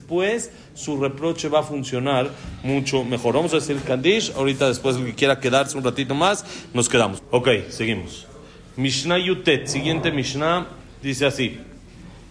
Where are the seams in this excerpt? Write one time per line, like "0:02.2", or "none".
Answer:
0:07.2